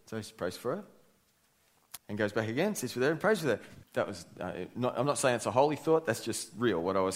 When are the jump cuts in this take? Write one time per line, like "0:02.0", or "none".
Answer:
0:02.0
0:03.8